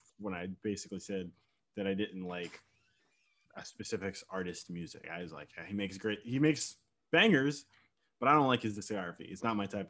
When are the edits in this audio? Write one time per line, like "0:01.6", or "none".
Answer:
0:05.0